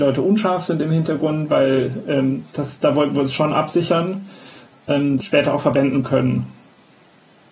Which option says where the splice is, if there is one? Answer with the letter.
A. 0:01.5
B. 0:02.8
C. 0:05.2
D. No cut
C